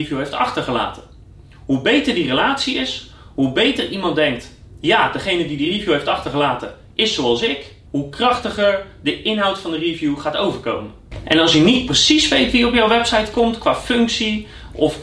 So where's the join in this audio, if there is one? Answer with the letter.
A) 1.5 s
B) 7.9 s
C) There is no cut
B